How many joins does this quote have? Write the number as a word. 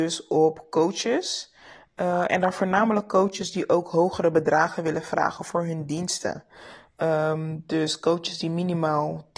zero